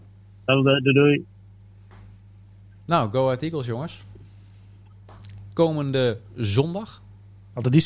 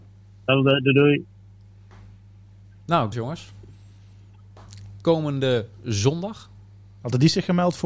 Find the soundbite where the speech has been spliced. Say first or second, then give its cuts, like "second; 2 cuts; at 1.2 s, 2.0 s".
second; 1 cut; at 3.1 s